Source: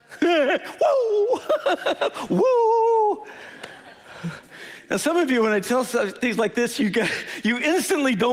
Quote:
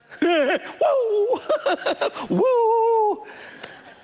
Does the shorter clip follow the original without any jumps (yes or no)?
yes